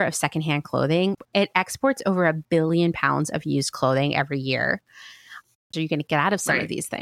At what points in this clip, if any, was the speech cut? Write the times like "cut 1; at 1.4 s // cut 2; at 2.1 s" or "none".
cut 1; at 5.7 s